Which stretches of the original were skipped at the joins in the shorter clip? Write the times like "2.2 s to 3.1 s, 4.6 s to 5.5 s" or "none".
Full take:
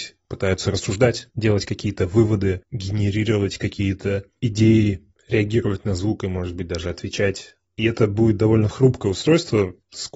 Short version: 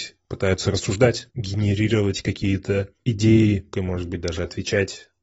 1.3 s to 2.7 s, 5.1 s to 6.2 s